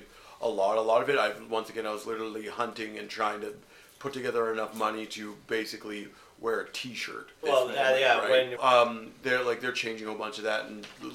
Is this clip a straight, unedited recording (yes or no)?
no